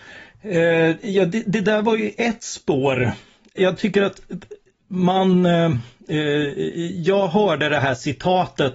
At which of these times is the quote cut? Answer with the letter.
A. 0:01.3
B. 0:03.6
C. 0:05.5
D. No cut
B